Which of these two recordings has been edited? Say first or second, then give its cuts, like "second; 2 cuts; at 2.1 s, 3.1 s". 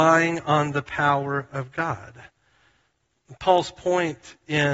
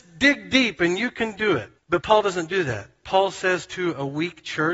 second; 1 cut; at 1.8 s